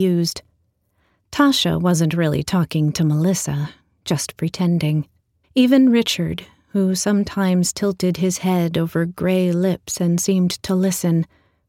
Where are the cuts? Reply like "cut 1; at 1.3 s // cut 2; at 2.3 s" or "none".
cut 1; at 5.4 s